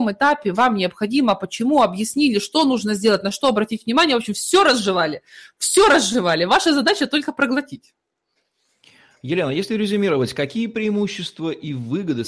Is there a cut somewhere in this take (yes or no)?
no